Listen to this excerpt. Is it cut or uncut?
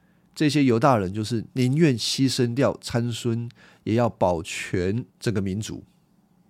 cut